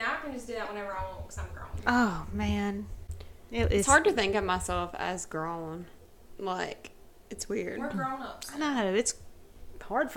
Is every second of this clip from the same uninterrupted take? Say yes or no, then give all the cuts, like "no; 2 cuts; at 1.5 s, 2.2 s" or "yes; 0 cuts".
yes; 0 cuts